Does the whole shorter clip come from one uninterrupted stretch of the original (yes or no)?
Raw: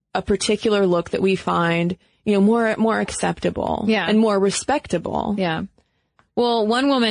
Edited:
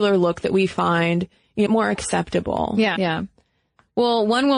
no